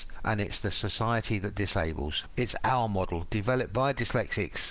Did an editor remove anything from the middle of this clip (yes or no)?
no